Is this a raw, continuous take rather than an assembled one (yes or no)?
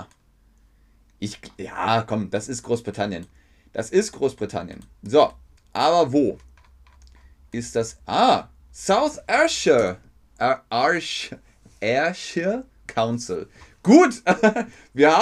yes